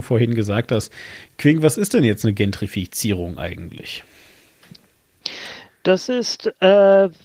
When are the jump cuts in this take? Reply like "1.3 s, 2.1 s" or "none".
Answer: none